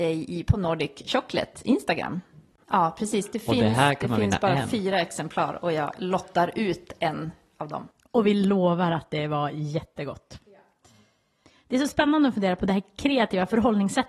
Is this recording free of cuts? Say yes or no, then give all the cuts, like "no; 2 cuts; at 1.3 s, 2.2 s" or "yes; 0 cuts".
no; 1 cut; at 2.6 s